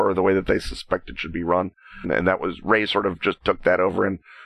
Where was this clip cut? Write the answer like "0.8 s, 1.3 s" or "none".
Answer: 2.0 s